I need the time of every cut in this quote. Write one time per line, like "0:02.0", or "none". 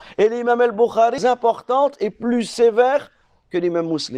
0:01.2